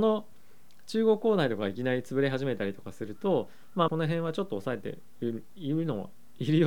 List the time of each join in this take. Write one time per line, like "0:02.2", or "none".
0:03.9

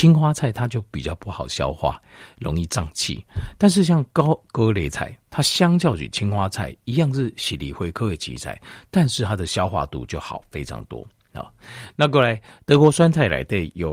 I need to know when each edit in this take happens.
none

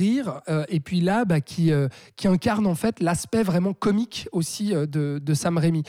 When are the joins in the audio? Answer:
none

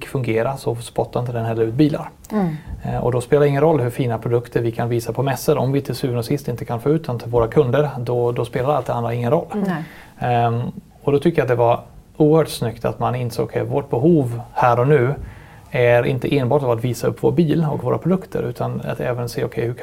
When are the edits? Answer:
0:12.1
0:17.8

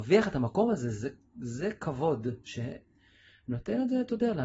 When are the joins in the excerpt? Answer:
none

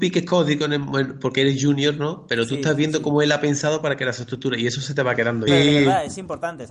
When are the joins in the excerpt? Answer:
0:05.5

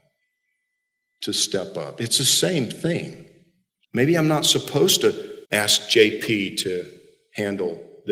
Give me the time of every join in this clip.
0:03.8
0:05.4

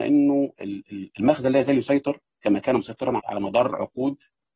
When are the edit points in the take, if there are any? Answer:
0:03.2

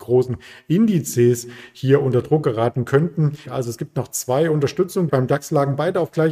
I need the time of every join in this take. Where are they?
0:03.5
0:05.1

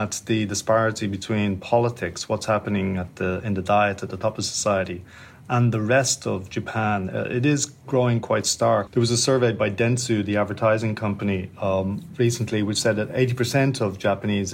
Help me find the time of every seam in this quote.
0:08.9

